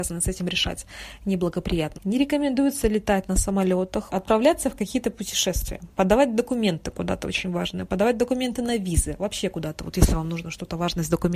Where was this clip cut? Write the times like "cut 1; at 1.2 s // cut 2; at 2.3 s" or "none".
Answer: cut 1; at 1.9 s // cut 2; at 4.1 s